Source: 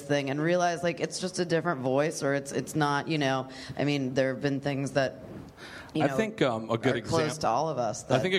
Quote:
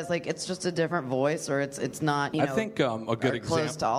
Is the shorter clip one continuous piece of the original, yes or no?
no